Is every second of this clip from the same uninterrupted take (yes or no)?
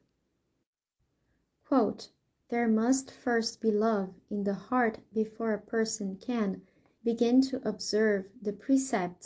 no